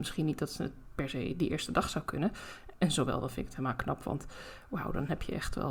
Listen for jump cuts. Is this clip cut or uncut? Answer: uncut